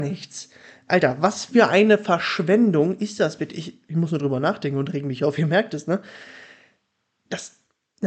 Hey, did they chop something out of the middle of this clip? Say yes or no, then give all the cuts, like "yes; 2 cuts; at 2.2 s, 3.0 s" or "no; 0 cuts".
no; 0 cuts